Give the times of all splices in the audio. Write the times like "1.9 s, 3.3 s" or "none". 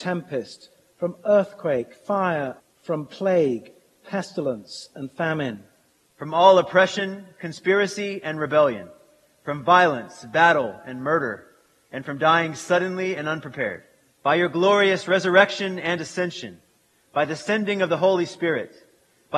2.6 s, 6.0 s, 14.1 s